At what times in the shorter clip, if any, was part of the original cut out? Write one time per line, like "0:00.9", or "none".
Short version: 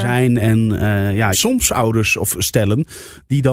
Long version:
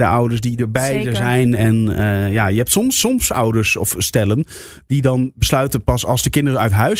0:01.3